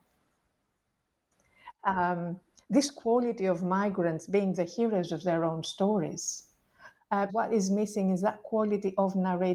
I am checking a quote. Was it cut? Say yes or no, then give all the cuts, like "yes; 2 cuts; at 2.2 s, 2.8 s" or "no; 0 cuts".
yes; 2 cuts; at 1.8 s, 7.3 s